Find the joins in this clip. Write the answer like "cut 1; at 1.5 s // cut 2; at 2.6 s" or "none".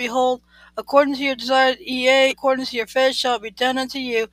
cut 1; at 2.3 s